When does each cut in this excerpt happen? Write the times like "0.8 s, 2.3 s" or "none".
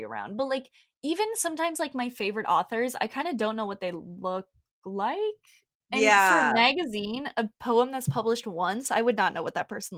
none